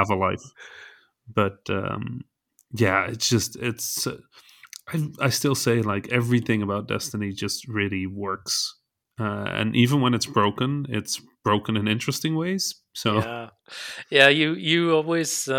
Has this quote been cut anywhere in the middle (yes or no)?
no